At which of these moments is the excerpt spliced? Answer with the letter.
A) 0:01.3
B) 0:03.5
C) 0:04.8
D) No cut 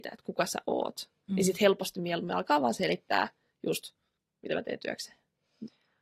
A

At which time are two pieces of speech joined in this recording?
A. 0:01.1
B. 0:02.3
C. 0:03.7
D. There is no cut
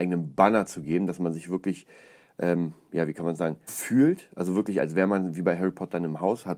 C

